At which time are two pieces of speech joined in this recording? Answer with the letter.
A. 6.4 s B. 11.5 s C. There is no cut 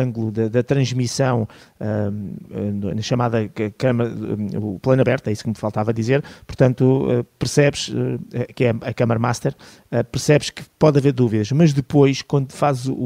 C